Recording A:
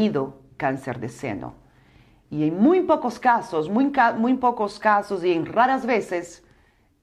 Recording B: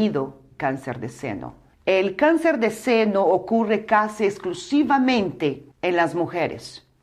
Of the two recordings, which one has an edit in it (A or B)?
B